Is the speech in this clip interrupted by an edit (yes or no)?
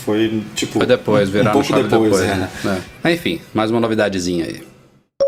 no